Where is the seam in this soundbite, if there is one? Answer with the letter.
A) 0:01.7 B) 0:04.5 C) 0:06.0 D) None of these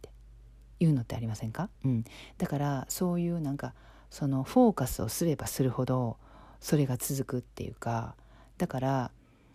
A